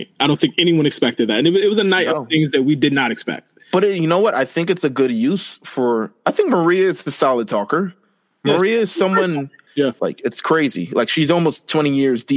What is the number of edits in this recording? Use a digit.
1